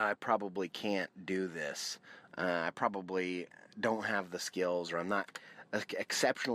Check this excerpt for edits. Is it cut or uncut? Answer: uncut